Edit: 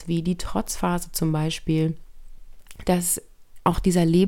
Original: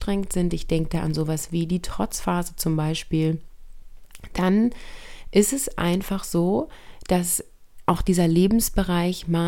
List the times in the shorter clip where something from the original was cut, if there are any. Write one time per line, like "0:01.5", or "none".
0:02.8